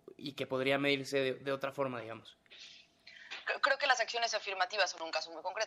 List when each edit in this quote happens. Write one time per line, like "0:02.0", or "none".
none